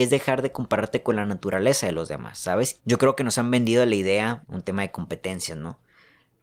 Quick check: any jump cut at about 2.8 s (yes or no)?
yes